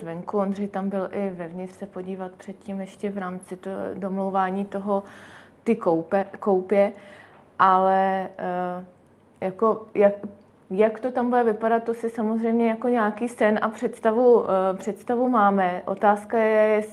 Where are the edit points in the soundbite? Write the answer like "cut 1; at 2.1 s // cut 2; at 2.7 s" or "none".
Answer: none